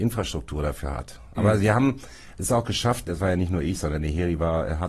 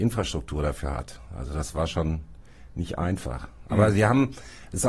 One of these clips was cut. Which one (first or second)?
first